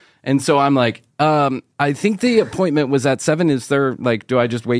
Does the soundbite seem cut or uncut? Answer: cut